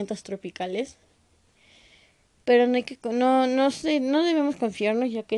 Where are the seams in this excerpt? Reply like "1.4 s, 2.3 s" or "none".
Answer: none